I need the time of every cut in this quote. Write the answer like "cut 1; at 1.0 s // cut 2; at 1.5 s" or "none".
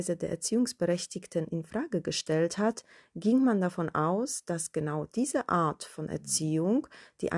none